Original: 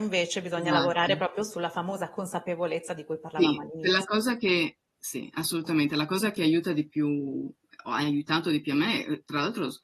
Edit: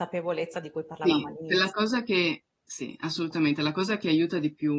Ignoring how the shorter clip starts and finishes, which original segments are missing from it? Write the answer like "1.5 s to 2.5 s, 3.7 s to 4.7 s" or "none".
none